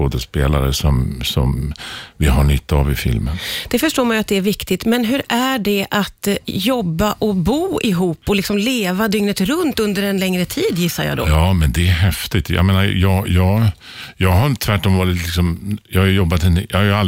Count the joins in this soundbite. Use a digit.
0